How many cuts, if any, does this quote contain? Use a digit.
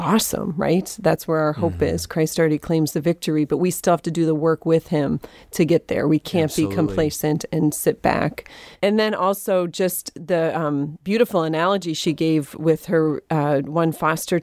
0